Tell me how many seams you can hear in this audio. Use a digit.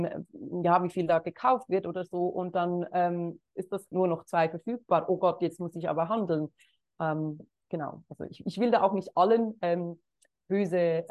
1